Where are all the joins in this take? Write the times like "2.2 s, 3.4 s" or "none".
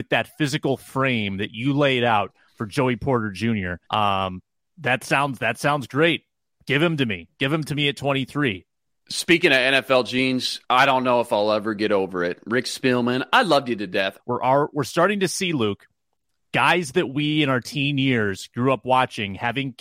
3.8 s, 14.2 s